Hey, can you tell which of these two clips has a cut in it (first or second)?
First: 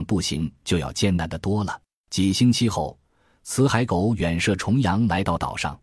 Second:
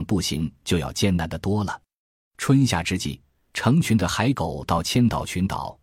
first